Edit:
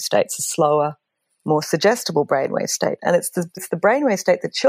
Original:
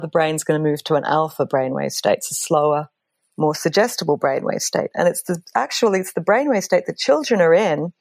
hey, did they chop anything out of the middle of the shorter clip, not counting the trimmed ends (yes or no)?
yes